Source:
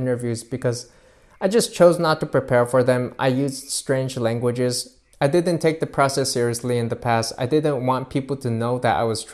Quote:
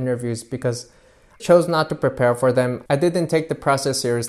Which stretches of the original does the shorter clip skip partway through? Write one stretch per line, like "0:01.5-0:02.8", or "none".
0:01.4-0:01.7
0:03.2-0:05.2